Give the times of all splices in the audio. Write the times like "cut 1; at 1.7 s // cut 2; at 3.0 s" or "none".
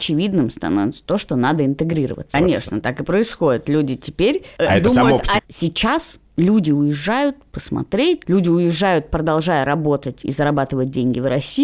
cut 1; at 2.3 s // cut 2; at 5.4 s // cut 3; at 8.2 s

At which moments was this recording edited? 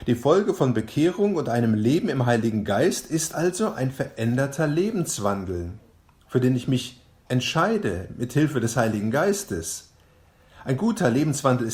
none

